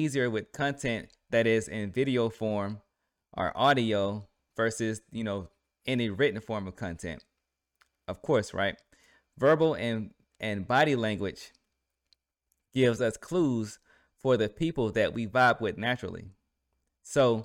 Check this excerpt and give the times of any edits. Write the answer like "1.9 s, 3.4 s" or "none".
none